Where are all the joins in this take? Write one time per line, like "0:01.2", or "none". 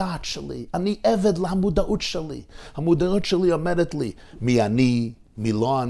none